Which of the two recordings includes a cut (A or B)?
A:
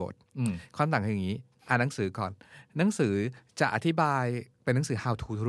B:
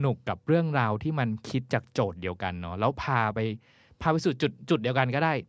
A